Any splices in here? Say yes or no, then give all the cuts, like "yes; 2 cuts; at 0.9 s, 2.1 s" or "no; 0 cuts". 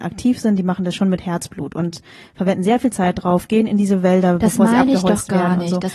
no; 0 cuts